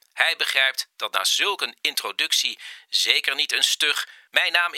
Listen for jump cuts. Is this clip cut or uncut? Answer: uncut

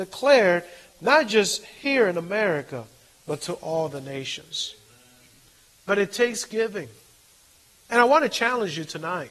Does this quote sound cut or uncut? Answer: uncut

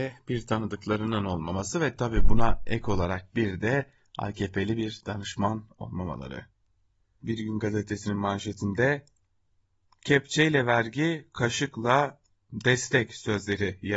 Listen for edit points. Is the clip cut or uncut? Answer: cut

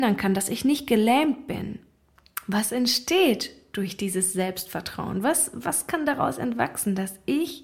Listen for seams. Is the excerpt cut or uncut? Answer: uncut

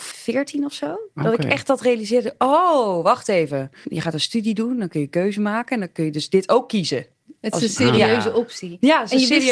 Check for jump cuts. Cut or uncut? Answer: uncut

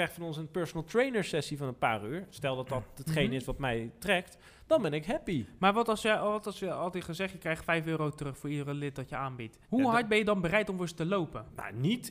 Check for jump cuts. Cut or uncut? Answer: cut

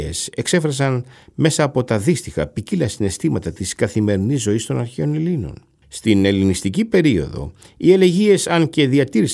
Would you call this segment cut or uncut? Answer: cut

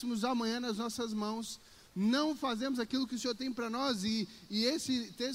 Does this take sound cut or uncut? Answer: uncut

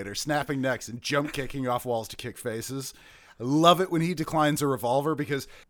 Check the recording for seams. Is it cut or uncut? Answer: uncut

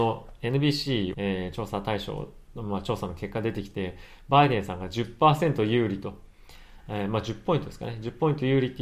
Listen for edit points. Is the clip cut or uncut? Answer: cut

